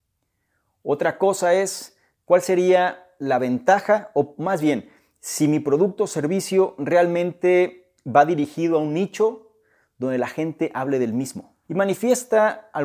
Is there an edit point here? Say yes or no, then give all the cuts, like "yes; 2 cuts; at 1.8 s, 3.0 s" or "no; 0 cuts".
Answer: yes; 1 cut; at 11.6 s